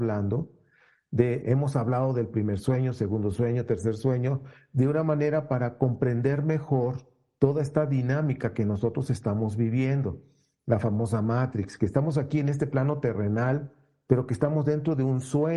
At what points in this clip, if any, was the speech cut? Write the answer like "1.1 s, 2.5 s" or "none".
1.4 s